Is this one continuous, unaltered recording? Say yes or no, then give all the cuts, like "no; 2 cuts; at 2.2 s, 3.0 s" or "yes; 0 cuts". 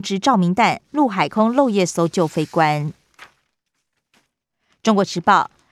yes; 0 cuts